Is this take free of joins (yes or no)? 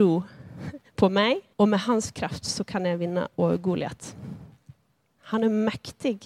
no